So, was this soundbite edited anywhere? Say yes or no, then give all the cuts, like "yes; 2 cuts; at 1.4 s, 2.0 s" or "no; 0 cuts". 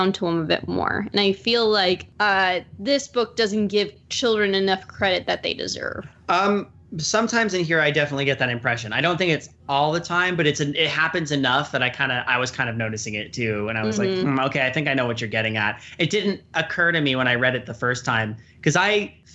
no; 0 cuts